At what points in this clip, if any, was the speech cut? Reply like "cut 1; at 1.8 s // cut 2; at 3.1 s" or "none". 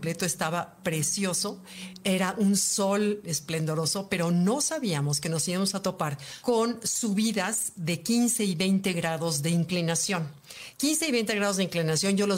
none